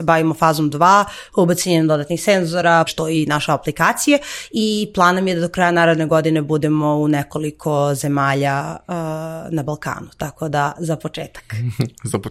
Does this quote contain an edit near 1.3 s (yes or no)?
no